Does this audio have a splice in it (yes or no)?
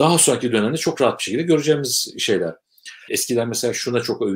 yes